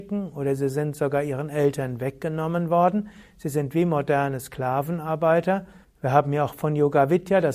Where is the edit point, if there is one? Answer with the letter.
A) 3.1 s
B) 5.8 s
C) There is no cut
B